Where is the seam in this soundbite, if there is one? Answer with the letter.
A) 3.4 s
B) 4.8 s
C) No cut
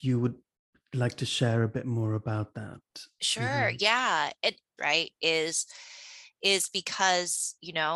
B